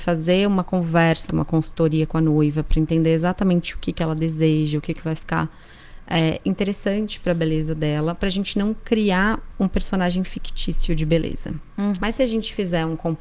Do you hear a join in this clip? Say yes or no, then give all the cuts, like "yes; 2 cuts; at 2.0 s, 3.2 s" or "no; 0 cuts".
yes; 2 cuts; at 1.3 s, 12.0 s